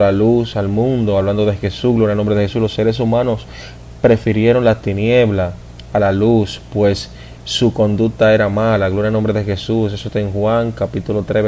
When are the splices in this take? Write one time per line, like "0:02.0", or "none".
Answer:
none